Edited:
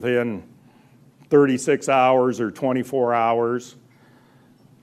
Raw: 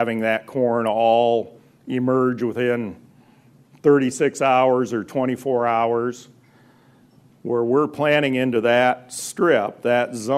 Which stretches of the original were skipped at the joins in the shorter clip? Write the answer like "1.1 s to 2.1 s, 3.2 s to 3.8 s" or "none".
none

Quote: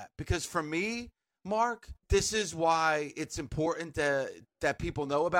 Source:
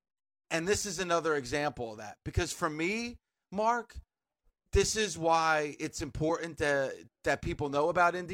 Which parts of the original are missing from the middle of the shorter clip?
4.1 s to 4.6 s

